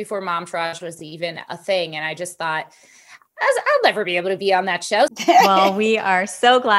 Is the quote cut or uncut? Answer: cut